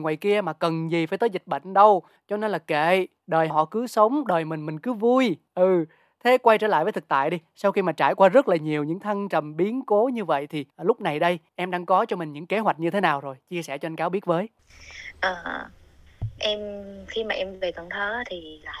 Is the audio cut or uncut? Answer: cut